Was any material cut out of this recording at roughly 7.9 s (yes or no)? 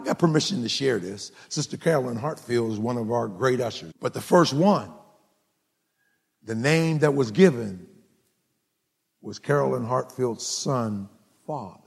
no